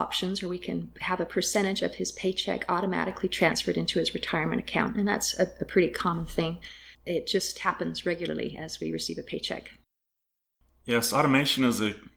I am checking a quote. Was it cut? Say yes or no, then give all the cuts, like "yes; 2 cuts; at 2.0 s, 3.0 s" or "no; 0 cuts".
yes; 1 cut; at 6.9 s